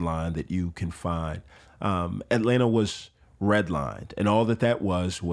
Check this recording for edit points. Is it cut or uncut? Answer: uncut